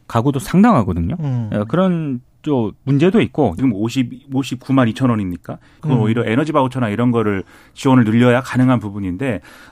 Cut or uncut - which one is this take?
cut